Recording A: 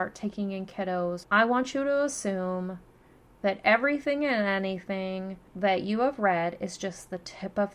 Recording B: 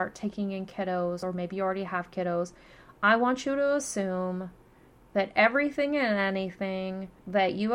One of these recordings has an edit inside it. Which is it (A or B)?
A